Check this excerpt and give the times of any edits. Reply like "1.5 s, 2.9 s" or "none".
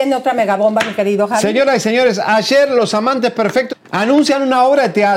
3.7 s